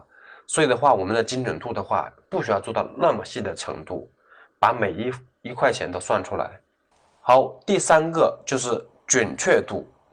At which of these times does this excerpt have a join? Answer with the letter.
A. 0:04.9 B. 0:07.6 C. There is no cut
C